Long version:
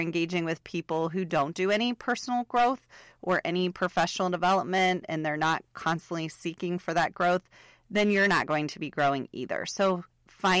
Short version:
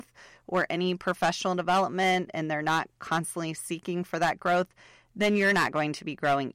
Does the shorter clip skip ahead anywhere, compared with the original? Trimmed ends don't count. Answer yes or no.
no